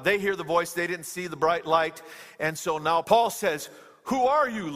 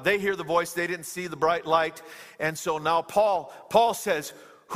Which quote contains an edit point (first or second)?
first